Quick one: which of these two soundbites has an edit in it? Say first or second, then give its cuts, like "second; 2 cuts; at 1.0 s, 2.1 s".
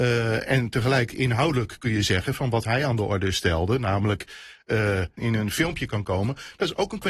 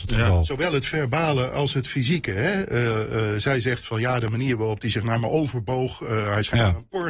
first; 1 cut; at 5.2 s